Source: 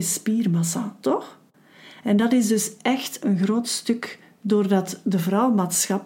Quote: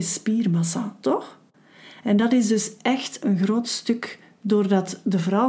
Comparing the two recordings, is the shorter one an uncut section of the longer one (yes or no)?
yes